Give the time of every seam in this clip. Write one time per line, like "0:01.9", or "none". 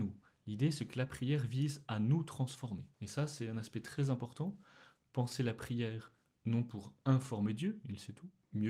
0:02.9